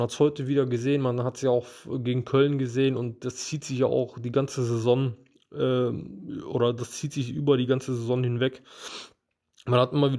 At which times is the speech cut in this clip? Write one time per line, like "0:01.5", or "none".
none